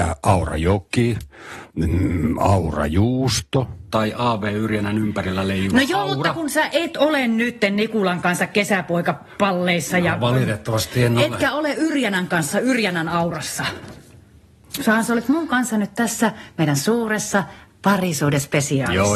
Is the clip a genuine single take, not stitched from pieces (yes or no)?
yes